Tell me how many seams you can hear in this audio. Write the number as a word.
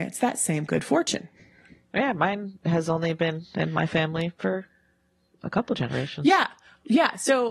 zero